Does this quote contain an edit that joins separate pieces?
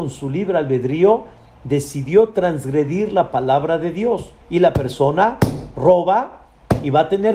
yes; 1 cut; at 4.4 s

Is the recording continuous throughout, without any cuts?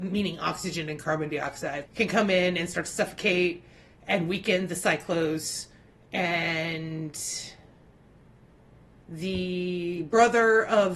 no; 1 cut; at 1.9 s

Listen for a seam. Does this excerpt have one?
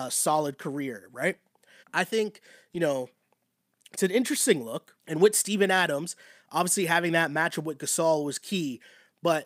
yes; 2 cuts; at 1.8 s, 5.0 s

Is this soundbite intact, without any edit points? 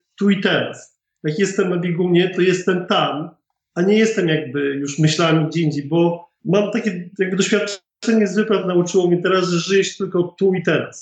yes; 0 cuts

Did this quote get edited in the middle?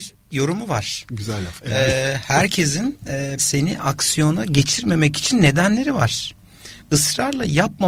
yes; 1 cut; at 3.4 s

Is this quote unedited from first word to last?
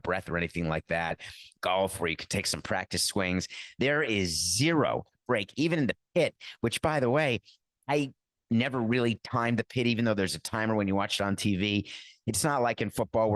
no; 1 cut; at 12.2 s

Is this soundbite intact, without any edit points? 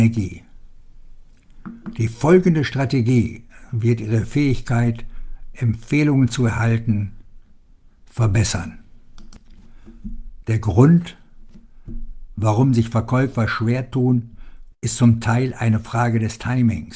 no; 2 cuts; at 10.4 s, 14.7 s

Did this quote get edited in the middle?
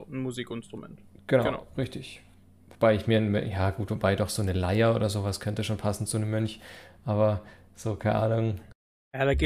no; 0 cuts

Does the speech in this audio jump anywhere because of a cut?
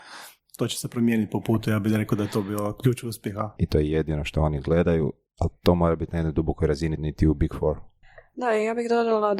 yes; 2 cuts; at 3.6 s, 7.0 s

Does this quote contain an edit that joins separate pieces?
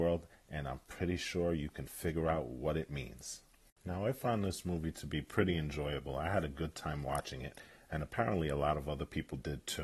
no; 0 cuts

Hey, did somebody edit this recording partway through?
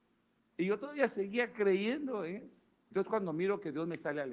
yes; 1 cut; at 2.9 s

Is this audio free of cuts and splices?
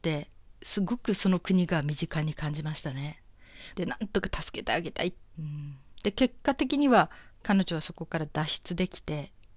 no; 2 cuts; at 3.8 s, 5.3 s

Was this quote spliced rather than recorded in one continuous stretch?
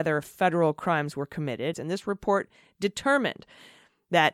yes; 1 cut; at 1.7 s

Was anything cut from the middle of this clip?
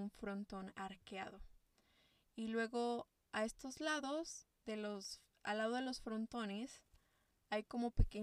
no; 0 cuts

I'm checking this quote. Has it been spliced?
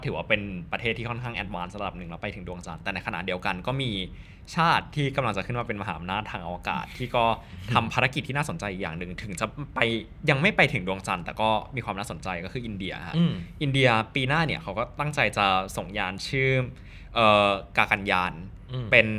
no; 0 cuts

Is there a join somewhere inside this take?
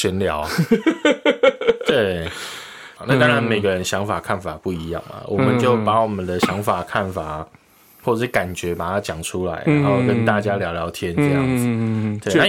yes; 1 cut; at 3.0 s

